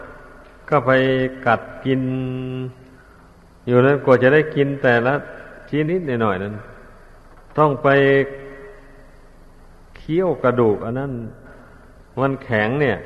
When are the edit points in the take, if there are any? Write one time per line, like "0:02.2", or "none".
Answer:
0:05.9

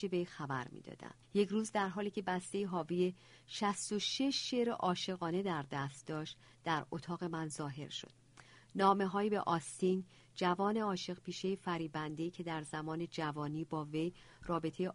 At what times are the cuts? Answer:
0:01.2

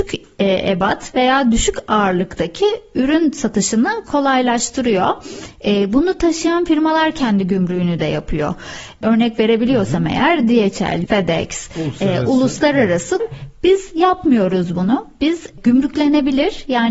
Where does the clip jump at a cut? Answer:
0:11.0
0:13.2

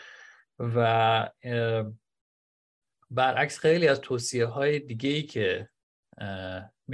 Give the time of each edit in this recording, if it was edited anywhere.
none

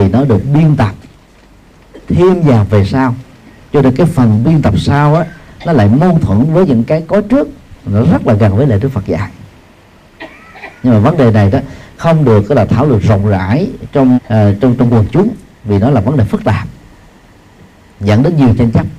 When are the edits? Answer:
0:14.1

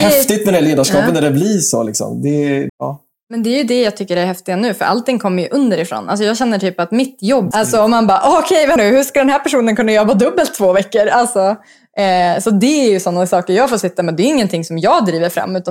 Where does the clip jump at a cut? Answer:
0:02.7
0:07.5
0:08.8

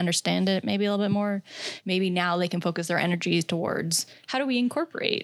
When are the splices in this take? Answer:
none

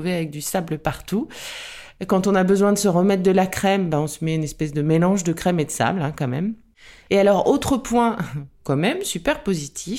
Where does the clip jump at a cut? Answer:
0:07.1

